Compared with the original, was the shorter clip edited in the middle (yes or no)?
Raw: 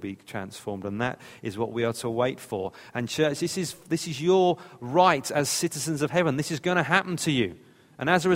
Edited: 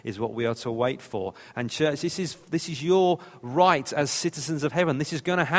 no